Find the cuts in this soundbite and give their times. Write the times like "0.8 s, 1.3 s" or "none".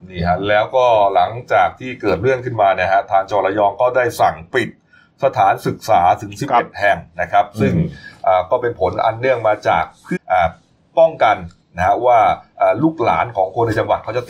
10.2 s